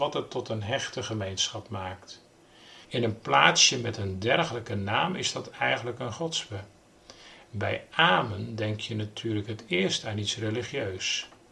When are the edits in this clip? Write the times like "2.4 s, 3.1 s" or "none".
2.8 s